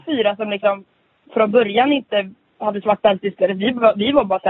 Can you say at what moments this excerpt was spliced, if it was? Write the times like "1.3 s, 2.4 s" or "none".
none

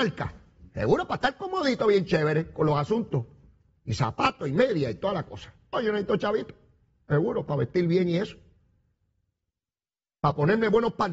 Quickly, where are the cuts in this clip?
5.7 s

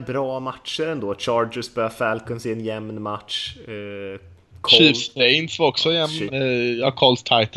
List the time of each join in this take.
6.3 s

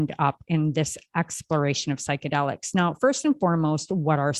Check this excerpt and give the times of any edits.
none

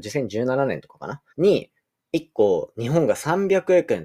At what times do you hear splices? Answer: 1.3 s

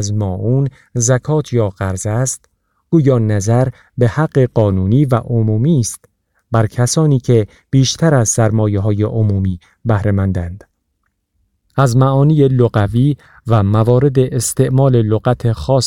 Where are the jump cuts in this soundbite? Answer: 11.7 s

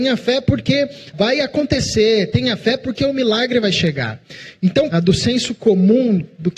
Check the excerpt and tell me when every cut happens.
1.1 s, 4.9 s

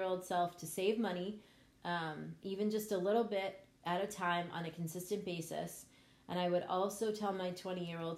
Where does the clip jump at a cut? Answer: 1.8 s

